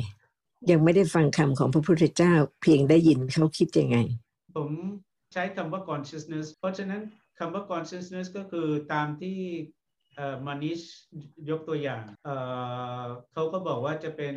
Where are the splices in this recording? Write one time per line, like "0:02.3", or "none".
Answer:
0:06.5
0:12.2